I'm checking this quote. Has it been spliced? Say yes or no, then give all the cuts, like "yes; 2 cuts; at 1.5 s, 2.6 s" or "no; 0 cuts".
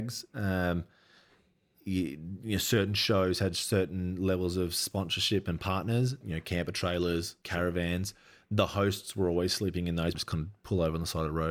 yes; 3 cuts; at 6.2 s, 7.4 s, 10.1 s